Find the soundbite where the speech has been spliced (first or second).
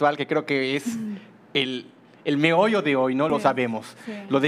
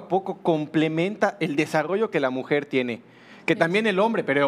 first